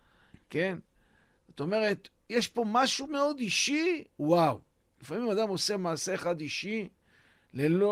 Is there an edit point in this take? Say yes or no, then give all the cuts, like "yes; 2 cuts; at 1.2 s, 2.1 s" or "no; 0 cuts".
yes; 1 cut; at 3.1 s